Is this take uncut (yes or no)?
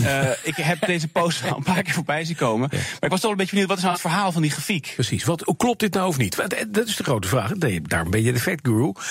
yes